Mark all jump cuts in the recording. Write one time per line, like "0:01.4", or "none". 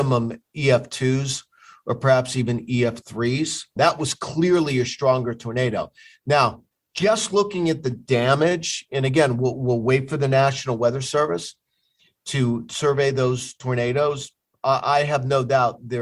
0:03.8